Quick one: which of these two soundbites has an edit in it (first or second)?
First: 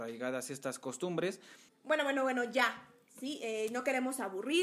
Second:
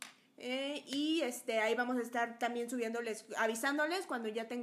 first